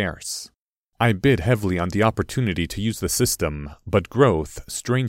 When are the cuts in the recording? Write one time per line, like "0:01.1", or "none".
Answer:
0:00.9